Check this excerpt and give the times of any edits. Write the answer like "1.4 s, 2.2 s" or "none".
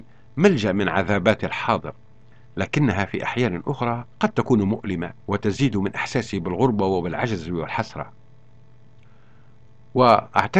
4.1 s, 5.2 s